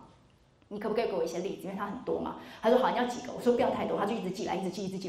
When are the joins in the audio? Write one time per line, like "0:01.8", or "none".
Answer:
none